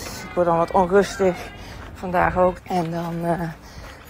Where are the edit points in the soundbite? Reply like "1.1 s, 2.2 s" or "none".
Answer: 2.6 s